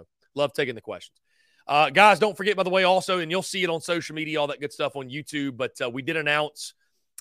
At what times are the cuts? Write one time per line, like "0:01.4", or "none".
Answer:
none